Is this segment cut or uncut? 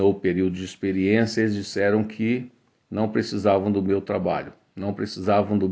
uncut